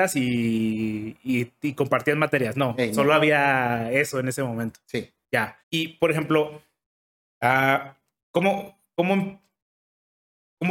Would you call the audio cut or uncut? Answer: cut